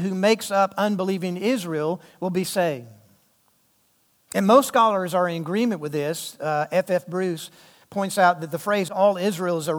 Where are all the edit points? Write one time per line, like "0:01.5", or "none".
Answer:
none